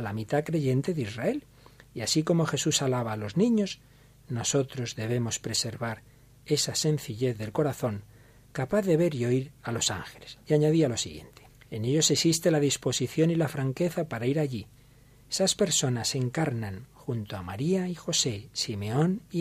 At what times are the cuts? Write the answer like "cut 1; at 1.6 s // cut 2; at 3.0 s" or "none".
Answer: cut 1; at 11.6 s